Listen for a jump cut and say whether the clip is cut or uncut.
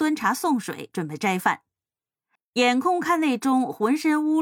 cut